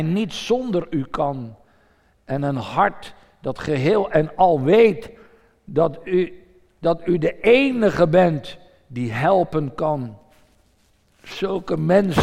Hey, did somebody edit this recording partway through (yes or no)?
no